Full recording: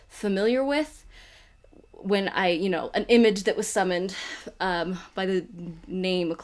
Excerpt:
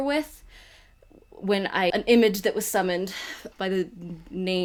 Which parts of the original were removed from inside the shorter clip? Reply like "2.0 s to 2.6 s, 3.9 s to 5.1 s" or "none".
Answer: 2.5 s to 2.9 s, 4.5 s to 5.1 s